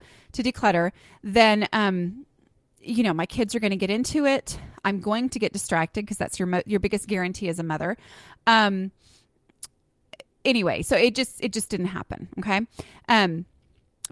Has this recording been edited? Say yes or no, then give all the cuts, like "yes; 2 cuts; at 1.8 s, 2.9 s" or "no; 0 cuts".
no; 0 cuts